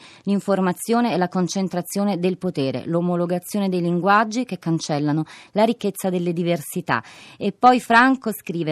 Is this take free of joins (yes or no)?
yes